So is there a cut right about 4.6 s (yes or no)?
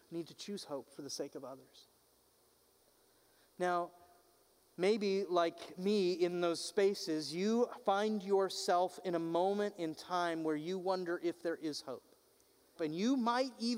no